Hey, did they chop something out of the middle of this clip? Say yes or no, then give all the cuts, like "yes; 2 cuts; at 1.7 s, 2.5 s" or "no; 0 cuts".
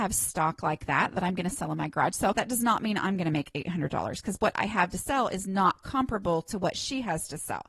yes; 1 cut; at 2.3 s